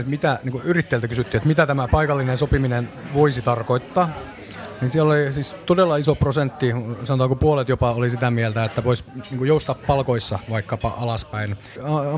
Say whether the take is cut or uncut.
uncut